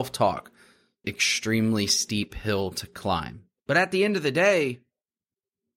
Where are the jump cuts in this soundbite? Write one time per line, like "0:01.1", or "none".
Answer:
0:01.0
0:03.6